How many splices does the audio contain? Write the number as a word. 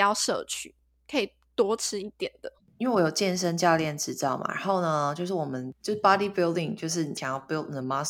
zero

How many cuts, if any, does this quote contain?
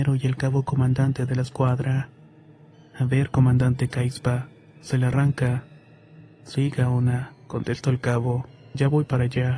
zero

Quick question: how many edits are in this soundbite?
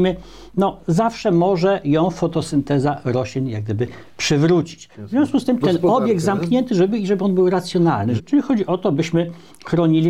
two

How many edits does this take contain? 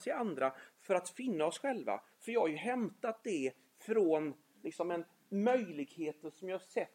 one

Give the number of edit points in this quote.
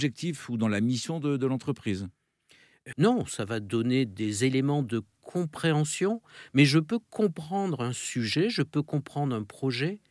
one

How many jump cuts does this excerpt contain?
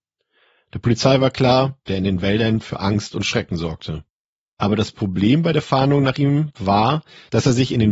one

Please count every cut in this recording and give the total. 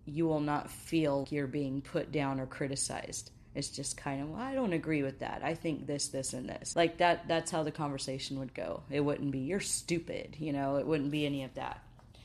two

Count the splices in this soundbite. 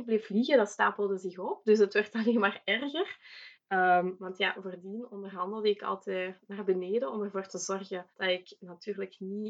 two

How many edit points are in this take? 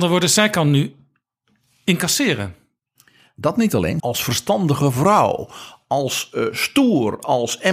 one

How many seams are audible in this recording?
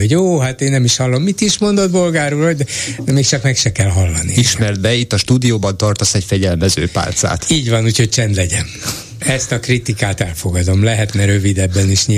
one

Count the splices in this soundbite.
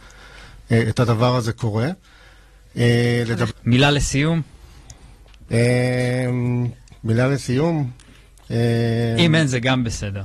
one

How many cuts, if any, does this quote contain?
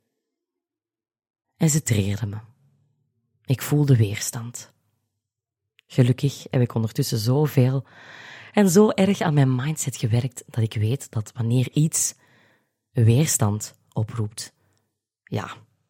one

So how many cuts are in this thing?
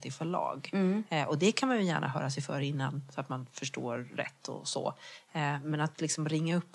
zero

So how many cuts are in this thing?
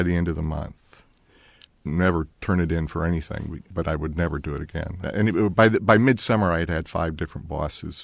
three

